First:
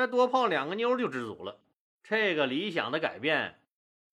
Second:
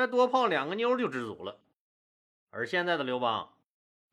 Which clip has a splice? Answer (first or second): first